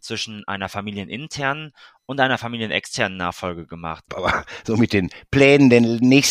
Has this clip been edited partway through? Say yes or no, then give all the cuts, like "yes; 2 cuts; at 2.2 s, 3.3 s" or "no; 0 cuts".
yes; 1 cut; at 4.1 s